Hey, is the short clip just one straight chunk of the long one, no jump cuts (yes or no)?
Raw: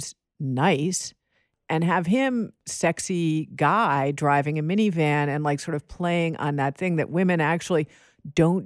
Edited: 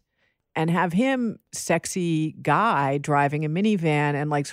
yes